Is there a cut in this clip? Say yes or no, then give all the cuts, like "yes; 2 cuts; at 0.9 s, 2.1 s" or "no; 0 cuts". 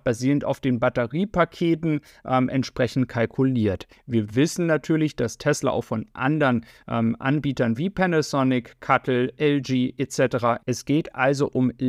yes; 2 cuts; at 3.9 s, 10.6 s